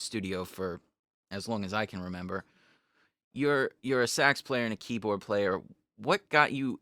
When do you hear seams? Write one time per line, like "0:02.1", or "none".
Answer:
none

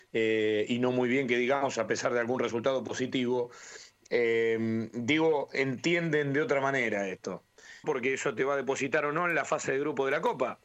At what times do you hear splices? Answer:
0:07.8

